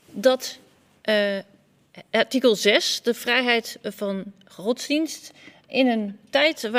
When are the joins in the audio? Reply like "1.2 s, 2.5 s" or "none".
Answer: 5.7 s

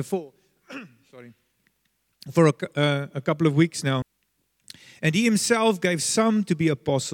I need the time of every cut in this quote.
4.0 s

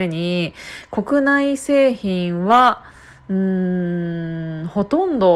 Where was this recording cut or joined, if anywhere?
none

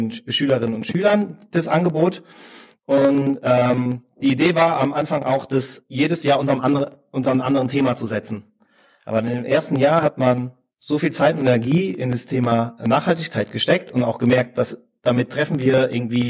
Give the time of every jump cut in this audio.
none

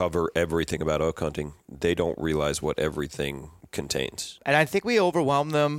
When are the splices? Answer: 4.4 s

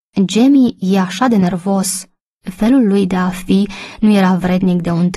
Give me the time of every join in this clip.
2.3 s

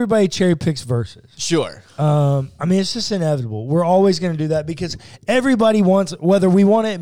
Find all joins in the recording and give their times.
none

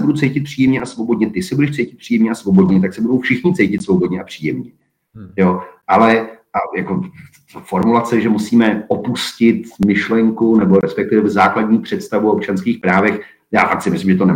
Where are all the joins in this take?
none

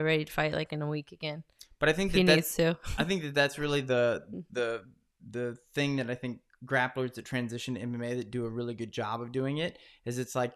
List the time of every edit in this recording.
none

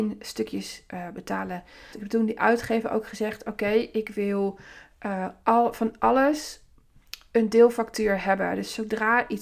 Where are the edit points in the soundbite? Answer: 1.9 s

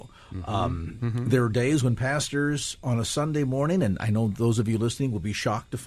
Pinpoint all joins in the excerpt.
none

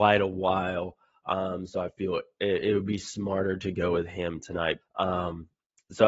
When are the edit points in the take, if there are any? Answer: 4.8 s

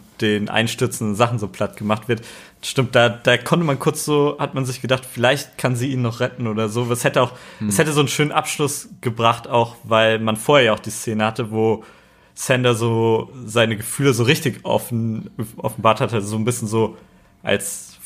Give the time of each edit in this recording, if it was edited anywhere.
none

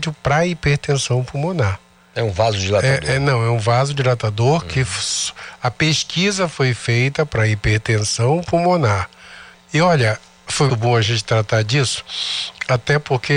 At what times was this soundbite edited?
9.5 s, 10.7 s

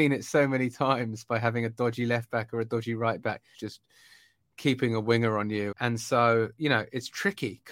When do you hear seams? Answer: 3.5 s, 5.7 s

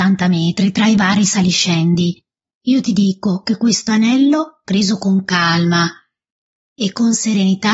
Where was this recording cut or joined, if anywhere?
none

